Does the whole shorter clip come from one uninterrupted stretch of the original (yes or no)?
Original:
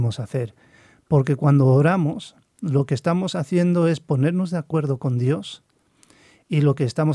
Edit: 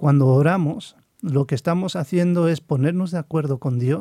yes